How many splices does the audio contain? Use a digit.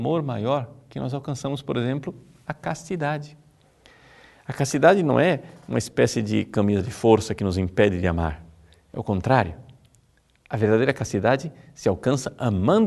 0